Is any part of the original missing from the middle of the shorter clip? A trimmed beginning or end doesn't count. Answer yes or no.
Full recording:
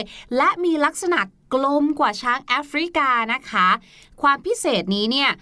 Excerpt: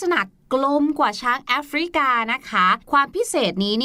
yes